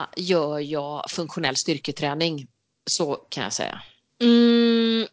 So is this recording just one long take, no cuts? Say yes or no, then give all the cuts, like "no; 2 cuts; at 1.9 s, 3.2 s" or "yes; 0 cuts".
no; 1 cut; at 4.1 s